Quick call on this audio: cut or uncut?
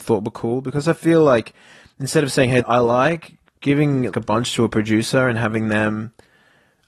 cut